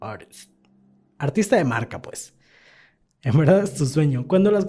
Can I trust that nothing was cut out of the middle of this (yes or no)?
no